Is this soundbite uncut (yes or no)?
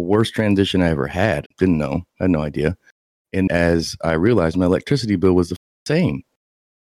no